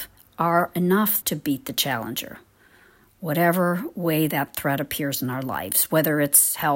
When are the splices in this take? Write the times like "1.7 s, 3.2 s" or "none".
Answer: 1.2 s